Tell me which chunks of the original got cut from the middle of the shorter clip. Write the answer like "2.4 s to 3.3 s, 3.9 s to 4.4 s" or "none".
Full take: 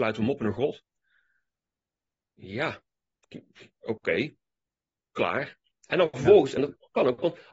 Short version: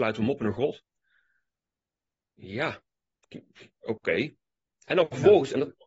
4.7 s to 5.7 s